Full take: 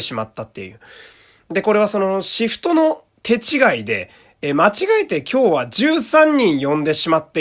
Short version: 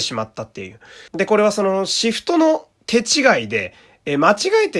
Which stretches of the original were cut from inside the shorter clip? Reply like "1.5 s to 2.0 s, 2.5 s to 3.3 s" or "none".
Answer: 1.1 s to 1.4 s